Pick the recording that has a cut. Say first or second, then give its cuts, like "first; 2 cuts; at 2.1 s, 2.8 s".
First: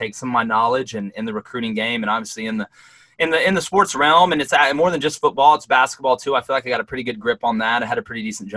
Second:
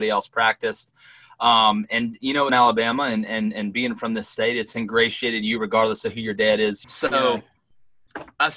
second; 2 cuts; at 2.5 s, 6.8 s